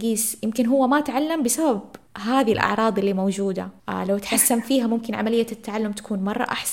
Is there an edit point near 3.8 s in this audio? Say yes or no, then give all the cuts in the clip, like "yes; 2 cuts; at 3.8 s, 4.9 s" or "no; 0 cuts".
yes; 2 cuts; at 2.1 s, 3.8 s